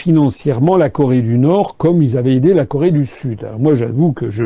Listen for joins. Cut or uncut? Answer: uncut